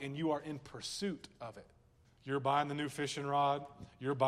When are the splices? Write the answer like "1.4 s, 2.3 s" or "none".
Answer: 2.0 s